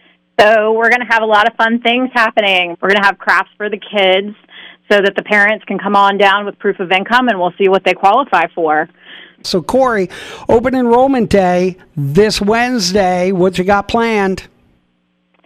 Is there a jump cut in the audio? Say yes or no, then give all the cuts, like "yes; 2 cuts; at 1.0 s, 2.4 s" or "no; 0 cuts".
yes; 2 cuts; at 2.7 s, 9.4 s